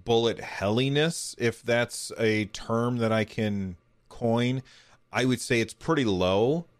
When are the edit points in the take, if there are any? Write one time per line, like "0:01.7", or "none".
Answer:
none

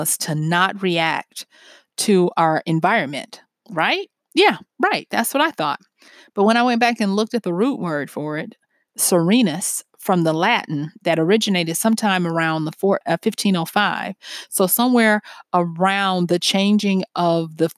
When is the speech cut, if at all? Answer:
0:13.0

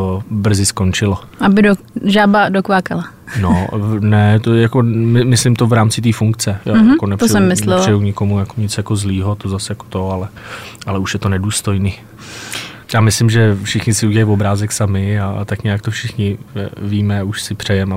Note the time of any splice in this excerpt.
0:08.5
0:12.8

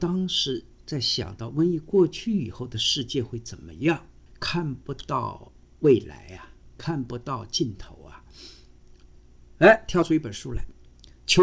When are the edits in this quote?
0:04.3

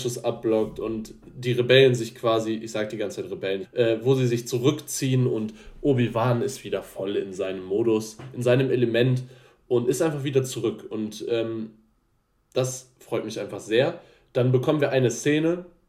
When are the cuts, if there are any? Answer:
0:03.6

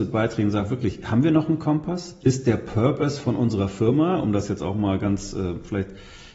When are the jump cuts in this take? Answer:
none

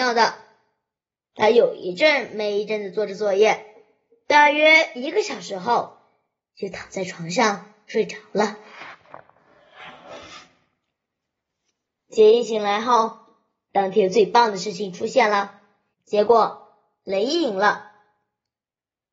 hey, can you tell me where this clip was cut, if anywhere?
0:15.9

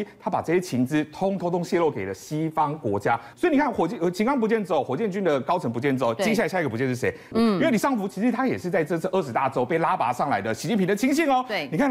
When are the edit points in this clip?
0:03.3
0:07.3

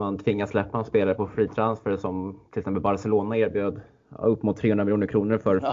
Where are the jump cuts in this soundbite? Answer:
none

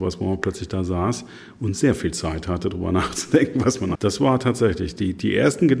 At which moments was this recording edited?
0:04.0

